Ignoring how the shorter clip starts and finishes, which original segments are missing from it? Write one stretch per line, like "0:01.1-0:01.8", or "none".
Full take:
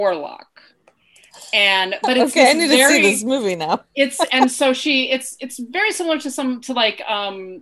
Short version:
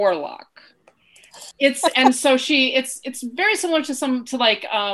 0:01.5-0:03.9

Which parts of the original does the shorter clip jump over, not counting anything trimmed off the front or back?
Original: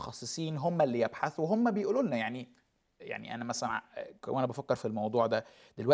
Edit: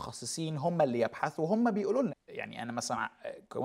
0:02.1-0:02.8

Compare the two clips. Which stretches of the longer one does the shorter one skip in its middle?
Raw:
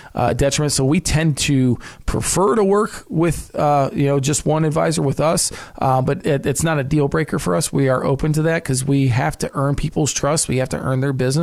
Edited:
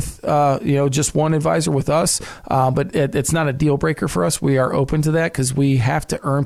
none

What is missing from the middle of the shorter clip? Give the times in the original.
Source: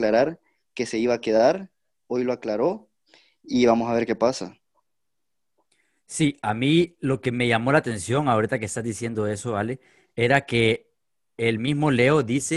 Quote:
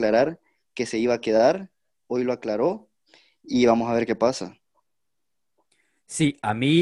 none

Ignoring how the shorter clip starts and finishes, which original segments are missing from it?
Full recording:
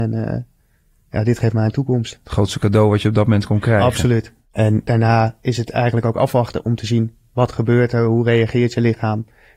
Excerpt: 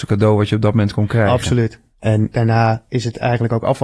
none

